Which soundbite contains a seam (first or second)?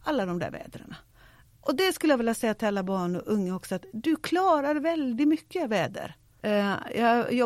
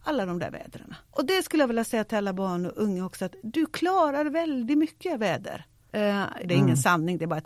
second